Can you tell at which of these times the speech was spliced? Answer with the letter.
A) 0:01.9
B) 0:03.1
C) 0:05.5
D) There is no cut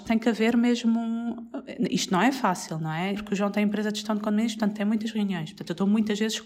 B